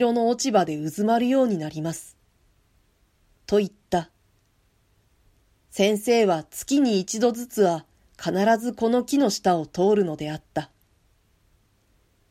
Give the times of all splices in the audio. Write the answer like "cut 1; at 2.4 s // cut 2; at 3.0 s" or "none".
none